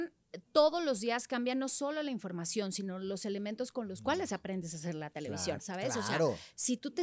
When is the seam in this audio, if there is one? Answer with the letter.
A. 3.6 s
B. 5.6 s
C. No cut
B